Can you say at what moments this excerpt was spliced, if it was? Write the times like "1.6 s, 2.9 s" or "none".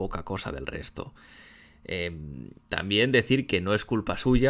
none

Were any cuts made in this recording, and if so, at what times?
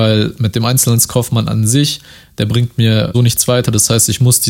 3.1 s

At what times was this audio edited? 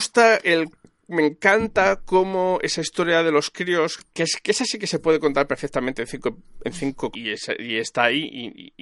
4.0 s, 7.1 s

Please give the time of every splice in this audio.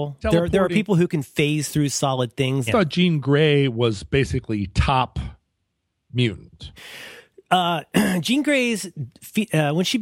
2.7 s

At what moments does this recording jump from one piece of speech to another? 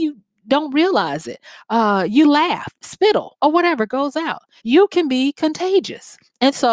2.7 s, 4.6 s

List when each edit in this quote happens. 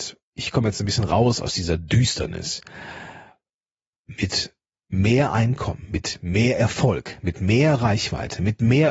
none

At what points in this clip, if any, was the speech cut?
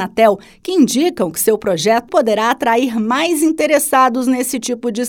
2.1 s

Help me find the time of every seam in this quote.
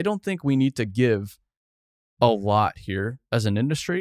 none

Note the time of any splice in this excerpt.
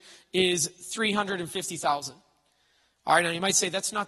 none

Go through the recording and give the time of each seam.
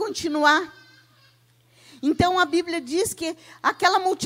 none

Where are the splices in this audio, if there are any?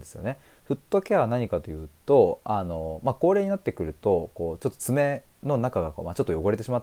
none

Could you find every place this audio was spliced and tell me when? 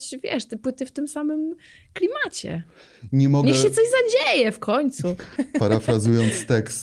5.4 s

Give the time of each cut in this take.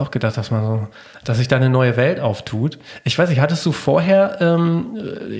none

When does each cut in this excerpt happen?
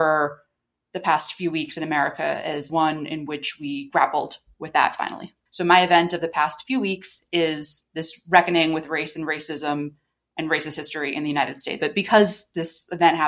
5.5 s, 11.8 s

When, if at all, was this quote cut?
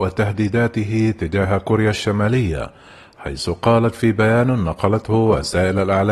none

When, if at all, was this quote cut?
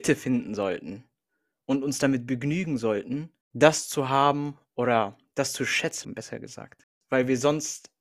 6.0 s

